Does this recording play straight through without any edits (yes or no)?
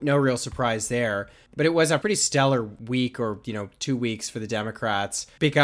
yes